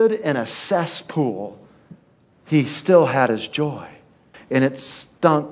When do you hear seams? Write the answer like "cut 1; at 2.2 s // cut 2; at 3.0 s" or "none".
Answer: cut 1; at 4.3 s